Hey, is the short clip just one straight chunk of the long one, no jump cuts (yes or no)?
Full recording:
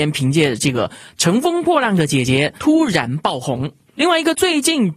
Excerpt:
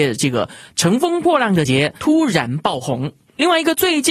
no